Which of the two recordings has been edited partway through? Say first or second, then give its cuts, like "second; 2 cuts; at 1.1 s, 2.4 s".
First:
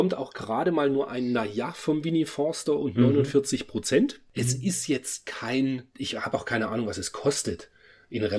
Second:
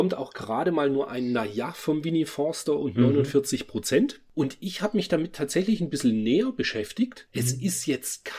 first; 2 cuts; at 4.3 s, 5.9 s